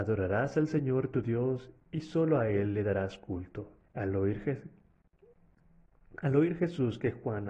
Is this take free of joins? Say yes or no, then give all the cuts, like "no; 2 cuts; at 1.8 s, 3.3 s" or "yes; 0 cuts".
no; 1 cut; at 3.8 s